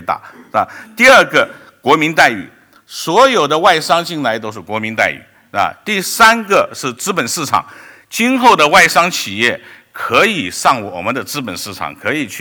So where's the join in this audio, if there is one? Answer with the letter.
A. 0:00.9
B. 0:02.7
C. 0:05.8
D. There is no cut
D